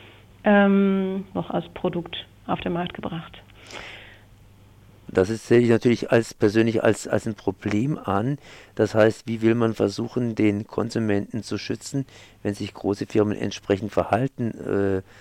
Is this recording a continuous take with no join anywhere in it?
no; 1 cut; at 1.3 s

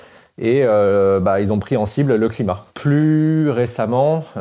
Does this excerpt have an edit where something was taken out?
no; 0 cuts

